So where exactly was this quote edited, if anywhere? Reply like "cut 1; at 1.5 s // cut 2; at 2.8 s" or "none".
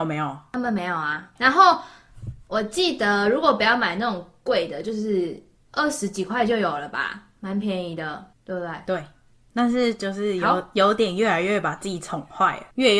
cut 1; at 1.4 s